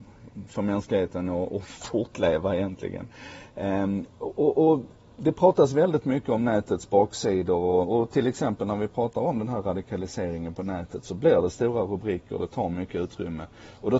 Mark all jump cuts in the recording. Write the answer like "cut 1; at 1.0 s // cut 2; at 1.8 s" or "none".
none